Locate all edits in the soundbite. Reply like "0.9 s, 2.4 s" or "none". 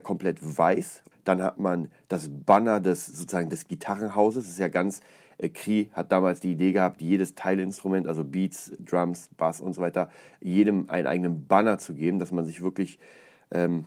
1.1 s